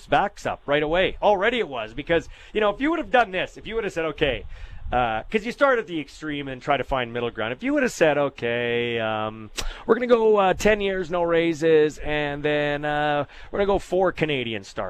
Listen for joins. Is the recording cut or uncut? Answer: uncut